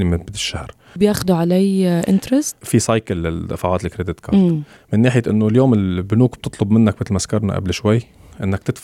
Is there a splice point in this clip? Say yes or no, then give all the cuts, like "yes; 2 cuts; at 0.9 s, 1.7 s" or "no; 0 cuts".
yes; 2 cuts; at 1.0 s, 4.8 s